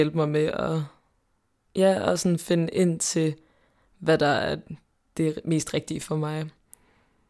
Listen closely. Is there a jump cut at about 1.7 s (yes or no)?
no